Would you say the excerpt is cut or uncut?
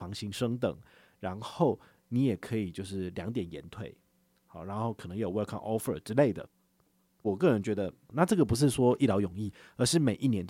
cut